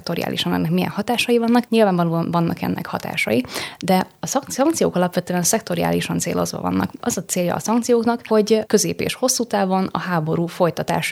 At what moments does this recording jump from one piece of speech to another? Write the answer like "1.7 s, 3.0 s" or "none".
1.7 s